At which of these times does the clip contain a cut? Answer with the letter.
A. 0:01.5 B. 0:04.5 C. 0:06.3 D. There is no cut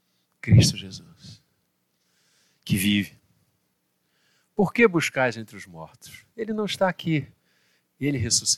D